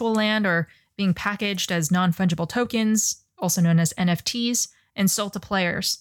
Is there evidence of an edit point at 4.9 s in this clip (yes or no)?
no